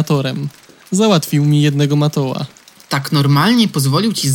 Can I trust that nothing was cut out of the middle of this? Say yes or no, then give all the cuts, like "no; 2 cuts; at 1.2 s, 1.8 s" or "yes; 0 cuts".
yes; 0 cuts